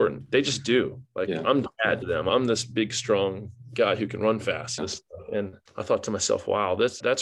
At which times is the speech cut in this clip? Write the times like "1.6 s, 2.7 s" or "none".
4.8 s